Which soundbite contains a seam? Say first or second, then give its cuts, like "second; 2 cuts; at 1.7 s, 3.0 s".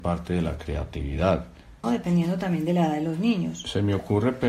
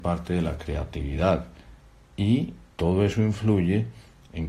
first; 1 cut; at 1.8 s